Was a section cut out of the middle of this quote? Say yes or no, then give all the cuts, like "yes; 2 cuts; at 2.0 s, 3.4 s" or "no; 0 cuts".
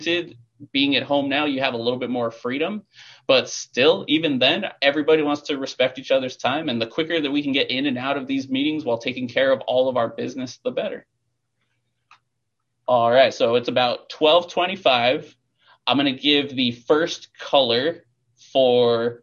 no; 0 cuts